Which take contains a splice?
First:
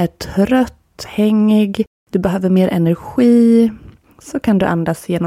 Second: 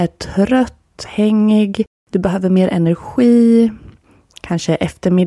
first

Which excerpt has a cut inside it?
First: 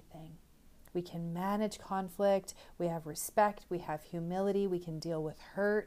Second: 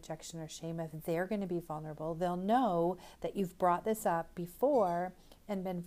first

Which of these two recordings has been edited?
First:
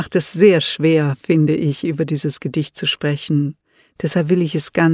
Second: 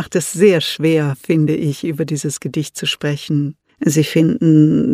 second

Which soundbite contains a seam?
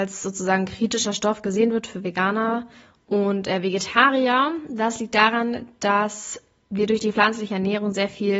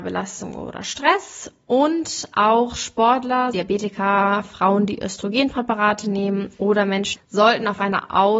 second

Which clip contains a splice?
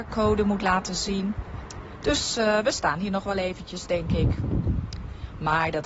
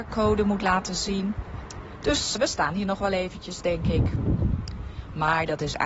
second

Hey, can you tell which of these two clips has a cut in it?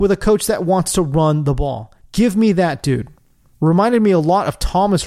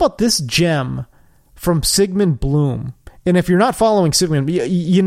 first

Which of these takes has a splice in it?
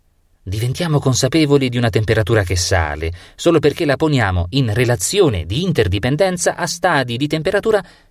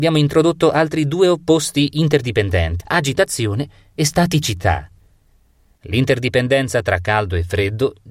second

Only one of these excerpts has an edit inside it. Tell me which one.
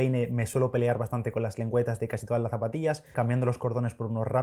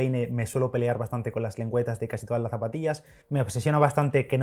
first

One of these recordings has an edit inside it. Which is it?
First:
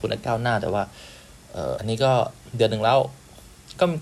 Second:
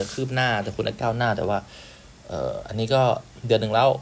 first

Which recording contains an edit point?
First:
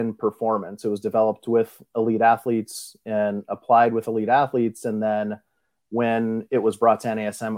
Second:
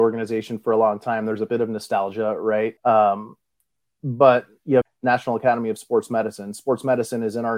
second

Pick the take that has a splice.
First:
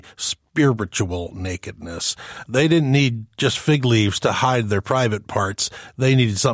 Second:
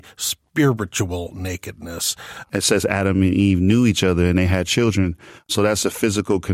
second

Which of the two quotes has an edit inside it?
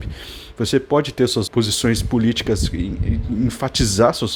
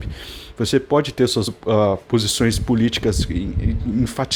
first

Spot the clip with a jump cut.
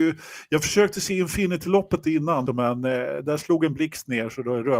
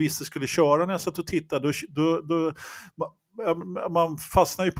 first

